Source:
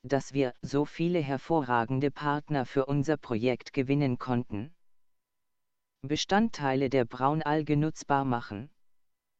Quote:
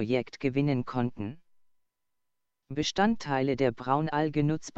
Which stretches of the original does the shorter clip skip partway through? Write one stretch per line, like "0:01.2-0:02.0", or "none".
none